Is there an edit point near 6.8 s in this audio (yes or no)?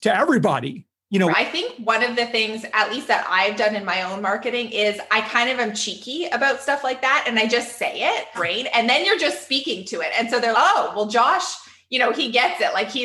no